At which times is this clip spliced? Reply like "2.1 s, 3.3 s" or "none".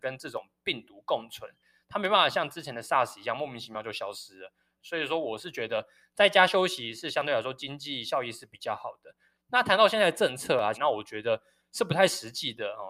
4.8 s, 10.7 s